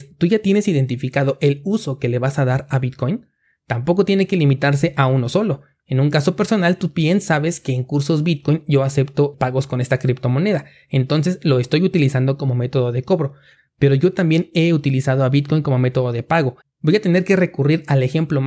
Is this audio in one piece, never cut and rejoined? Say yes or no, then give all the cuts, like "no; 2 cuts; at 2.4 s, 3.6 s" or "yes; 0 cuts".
no; 2 cuts; at 9.3 s, 16.6 s